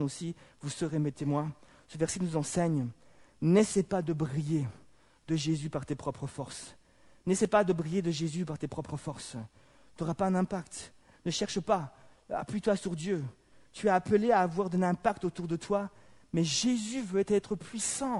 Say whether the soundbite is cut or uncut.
uncut